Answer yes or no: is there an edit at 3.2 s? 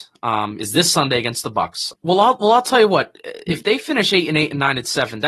no